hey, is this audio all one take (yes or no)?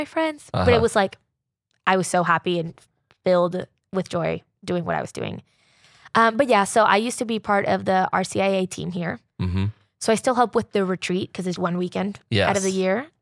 no